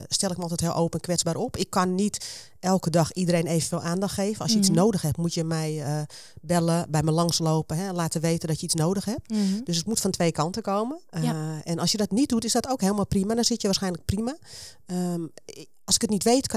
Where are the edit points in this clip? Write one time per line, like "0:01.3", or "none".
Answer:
none